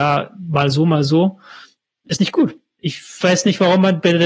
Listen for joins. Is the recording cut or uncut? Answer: uncut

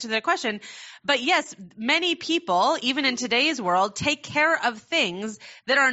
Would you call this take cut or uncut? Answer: uncut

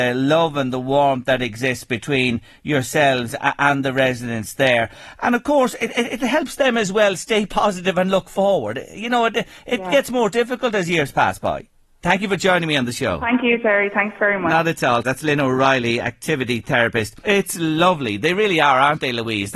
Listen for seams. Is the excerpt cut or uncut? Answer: cut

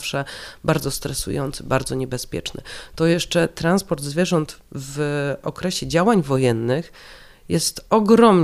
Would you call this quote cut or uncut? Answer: uncut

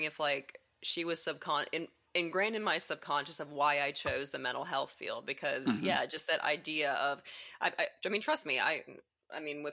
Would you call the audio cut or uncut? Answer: uncut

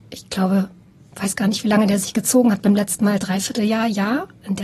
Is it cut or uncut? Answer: uncut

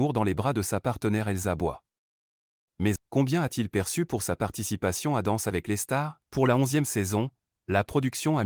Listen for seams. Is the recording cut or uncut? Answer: cut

